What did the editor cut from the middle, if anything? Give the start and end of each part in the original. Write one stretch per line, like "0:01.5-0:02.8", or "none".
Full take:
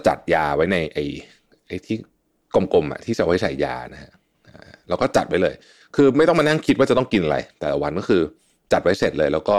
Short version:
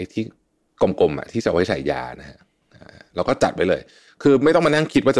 none